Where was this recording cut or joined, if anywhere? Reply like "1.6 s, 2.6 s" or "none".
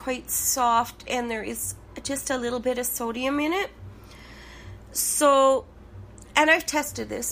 6.3 s

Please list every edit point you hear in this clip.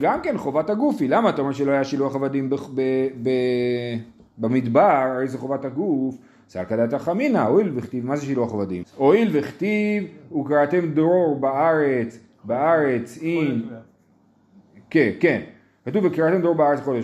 8.8 s

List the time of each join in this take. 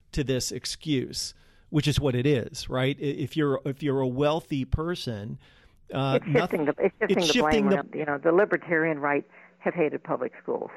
7.8 s, 9.7 s

